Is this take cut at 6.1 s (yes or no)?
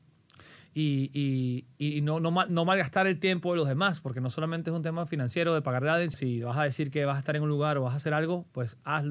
yes